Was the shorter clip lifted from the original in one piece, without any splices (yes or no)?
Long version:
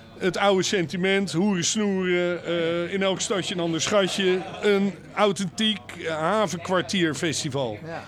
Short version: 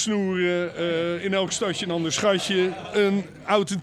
yes